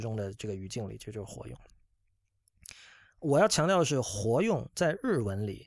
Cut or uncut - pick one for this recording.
uncut